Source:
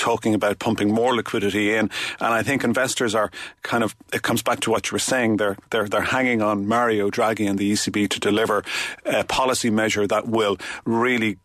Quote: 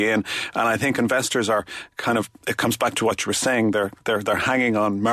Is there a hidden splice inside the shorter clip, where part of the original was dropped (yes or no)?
no